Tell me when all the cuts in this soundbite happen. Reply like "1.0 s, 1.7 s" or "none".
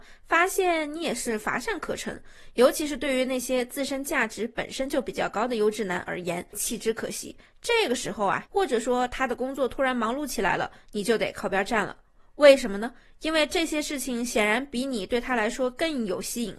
6.5 s, 8.5 s